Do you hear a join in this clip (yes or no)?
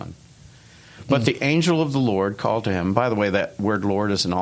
no